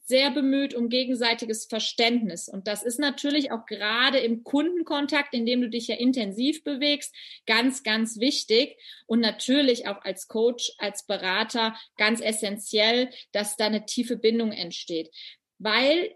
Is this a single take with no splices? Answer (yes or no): yes